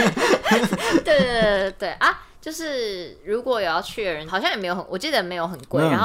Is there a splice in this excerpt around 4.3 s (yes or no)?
yes